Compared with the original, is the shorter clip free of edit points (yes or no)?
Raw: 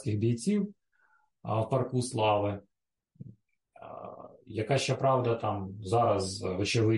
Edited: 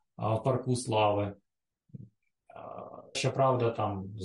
no